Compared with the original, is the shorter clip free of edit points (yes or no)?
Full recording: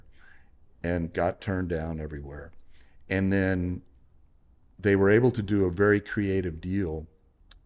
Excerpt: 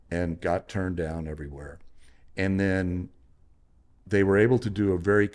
yes